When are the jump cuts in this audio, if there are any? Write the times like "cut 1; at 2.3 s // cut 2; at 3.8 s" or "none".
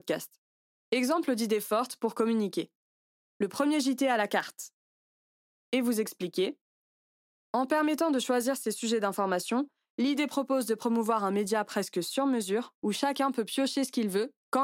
none